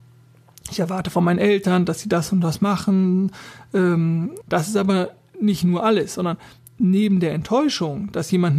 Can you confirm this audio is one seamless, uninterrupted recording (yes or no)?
no